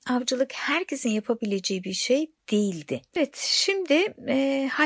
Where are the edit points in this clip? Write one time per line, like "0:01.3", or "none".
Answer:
0:03.2

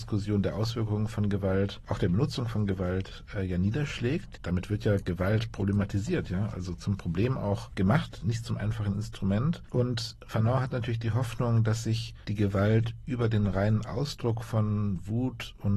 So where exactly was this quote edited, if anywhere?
none

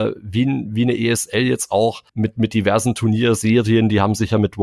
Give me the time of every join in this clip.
0:02.1

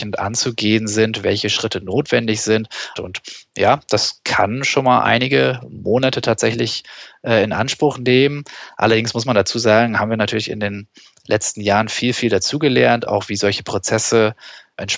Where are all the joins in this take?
0:03.0

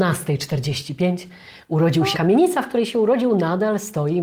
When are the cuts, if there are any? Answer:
0:02.1

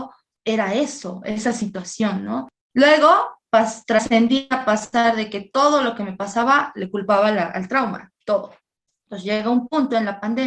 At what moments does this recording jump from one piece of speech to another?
none

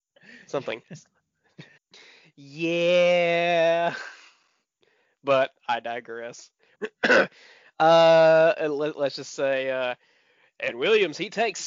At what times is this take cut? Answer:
0:01.8
0:06.7

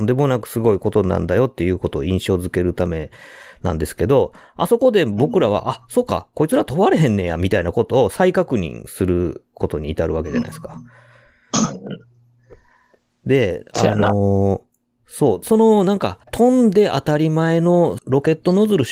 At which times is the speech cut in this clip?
0:16.2
0:18.0

